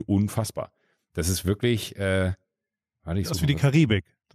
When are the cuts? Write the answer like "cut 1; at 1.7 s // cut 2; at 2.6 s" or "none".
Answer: none